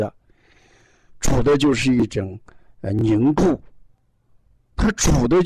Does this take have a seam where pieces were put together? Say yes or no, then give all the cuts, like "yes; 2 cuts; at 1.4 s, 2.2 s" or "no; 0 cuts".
yes; 1 cut; at 1.1 s